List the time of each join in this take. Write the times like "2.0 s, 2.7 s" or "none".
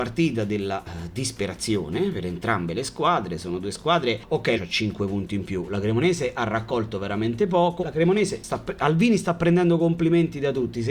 4.5 s, 7.8 s